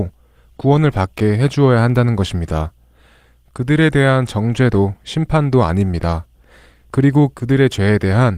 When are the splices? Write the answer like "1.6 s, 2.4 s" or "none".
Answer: none